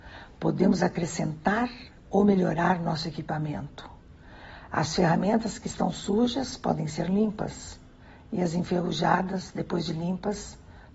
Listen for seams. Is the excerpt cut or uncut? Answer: uncut